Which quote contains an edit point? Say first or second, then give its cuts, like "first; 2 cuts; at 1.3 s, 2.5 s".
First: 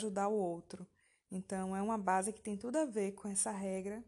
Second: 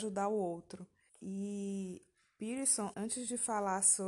second; 2 cuts; at 1.1 s, 2.9 s